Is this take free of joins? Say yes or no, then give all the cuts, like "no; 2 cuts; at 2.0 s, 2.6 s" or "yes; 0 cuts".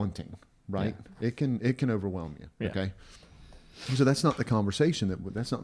yes; 0 cuts